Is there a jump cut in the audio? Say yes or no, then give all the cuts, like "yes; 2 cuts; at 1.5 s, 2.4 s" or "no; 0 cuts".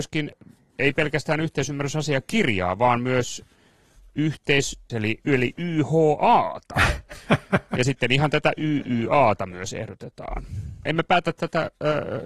yes; 2 cuts; at 4.9 s, 10.9 s